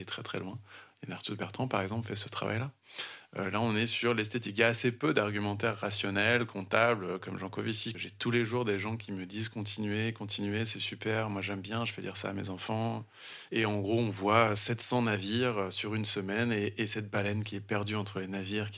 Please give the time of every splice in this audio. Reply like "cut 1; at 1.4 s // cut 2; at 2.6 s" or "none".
cut 1; at 7.9 s // cut 2; at 13.5 s